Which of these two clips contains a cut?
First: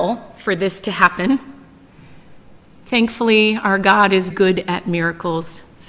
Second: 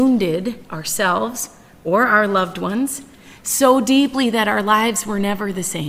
first; 1 cut; at 4.3 s

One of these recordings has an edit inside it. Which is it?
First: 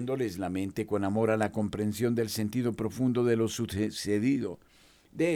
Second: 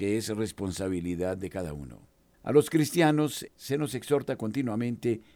second; 2 cuts; at 2.3 s, 3.5 s

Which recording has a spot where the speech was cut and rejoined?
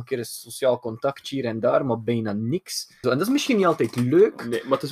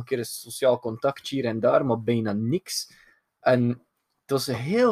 first; 1 cut; at 3.0 s

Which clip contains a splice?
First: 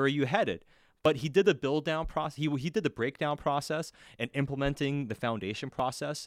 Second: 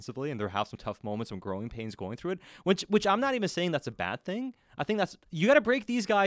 second; 1 cut; at 5.3 s

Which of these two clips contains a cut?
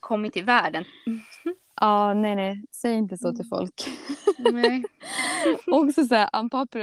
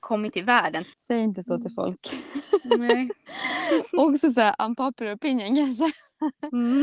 second; 1 cut; at 0.9 s

